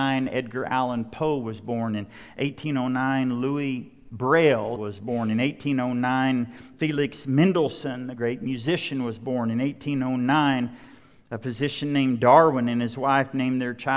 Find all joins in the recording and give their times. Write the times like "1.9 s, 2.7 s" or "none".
4.8 s

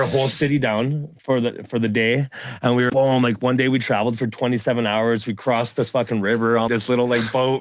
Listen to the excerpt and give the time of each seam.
2.9 s, 6.7 s

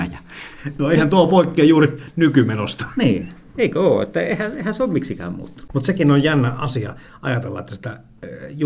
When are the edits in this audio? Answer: none

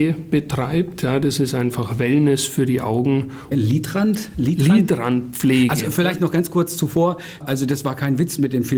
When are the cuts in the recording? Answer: 3.5 s, 7.4 s

